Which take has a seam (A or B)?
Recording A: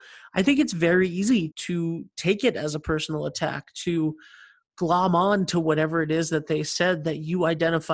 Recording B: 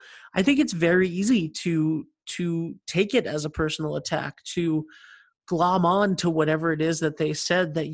A